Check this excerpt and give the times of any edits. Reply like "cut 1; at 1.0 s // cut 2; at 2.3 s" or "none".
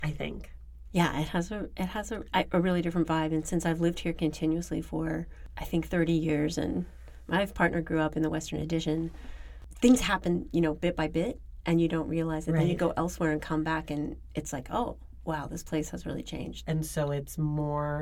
cut 1; at 16.6 s